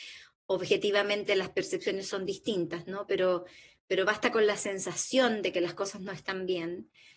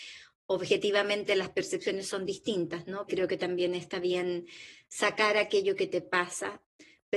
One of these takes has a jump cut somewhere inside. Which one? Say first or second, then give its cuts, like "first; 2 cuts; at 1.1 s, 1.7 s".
second; 1 cut; at 3.1 s